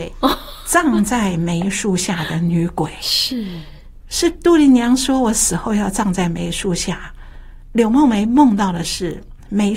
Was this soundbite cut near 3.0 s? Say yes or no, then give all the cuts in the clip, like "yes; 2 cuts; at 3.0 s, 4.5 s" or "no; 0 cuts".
no; 0 cuts